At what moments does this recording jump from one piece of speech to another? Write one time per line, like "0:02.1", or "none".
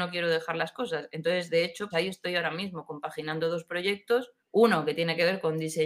0:01.9
0:04.4